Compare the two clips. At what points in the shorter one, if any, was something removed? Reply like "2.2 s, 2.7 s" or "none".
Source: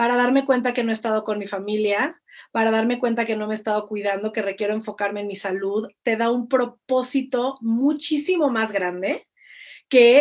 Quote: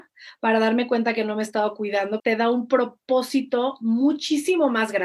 2.2 s